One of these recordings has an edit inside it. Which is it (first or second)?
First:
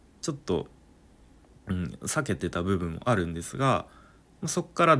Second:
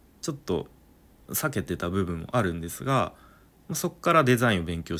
second